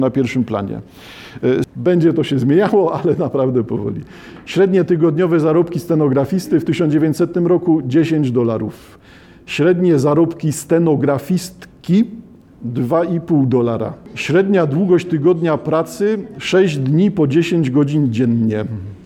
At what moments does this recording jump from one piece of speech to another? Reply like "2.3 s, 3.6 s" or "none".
1.6 s